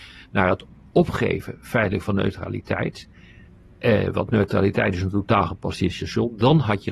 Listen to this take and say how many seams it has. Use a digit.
0